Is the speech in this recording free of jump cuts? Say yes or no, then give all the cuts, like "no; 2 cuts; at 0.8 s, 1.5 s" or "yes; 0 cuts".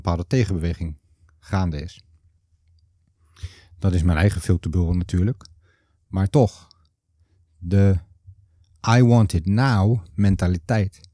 yes; 0 cuts